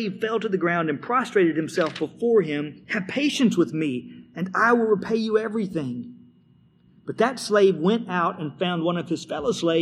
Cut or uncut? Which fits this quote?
cut